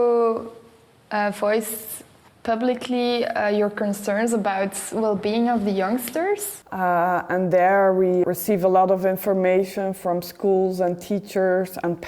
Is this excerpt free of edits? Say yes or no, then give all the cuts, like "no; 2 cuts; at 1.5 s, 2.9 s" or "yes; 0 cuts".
no; 2 cuts; at 6.6 s, 8.2 s